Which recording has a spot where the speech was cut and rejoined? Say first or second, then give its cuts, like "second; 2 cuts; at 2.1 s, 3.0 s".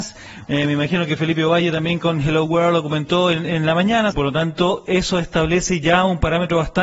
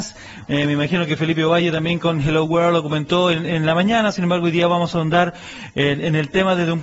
first; 1 cut; at 4.1 s